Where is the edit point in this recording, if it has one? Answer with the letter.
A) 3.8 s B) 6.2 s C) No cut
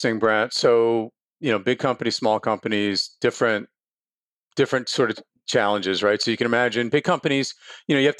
C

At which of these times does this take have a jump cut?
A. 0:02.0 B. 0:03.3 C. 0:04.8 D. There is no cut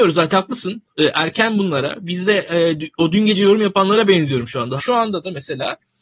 C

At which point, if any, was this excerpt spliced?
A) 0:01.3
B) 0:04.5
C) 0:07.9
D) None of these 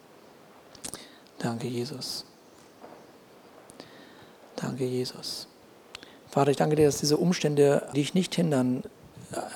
C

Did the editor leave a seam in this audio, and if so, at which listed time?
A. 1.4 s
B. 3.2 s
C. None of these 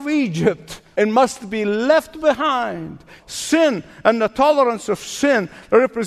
B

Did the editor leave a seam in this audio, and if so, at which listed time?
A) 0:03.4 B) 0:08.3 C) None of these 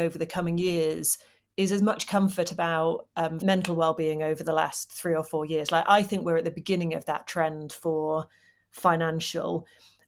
A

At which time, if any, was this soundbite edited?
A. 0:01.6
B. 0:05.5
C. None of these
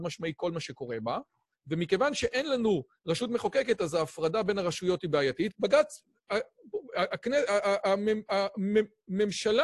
B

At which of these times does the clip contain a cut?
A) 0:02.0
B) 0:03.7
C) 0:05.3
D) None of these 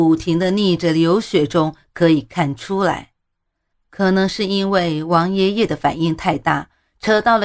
B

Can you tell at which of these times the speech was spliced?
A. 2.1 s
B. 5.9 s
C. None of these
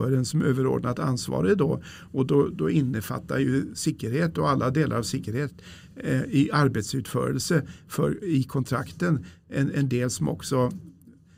A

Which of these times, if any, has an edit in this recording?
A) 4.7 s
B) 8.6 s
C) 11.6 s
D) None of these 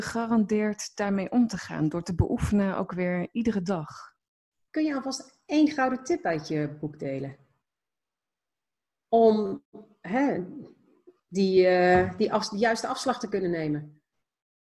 A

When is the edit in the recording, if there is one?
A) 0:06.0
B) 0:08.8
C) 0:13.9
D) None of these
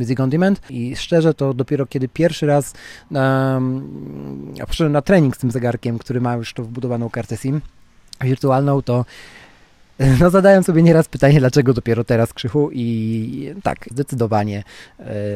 C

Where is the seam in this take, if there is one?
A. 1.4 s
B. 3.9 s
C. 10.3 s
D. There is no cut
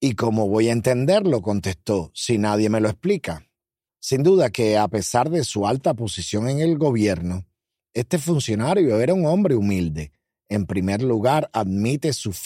B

